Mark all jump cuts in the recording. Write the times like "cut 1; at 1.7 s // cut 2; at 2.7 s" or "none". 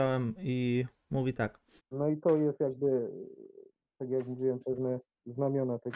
cut 1; at 1.8 s